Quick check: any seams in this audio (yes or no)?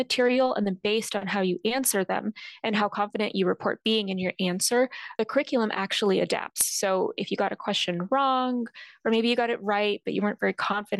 no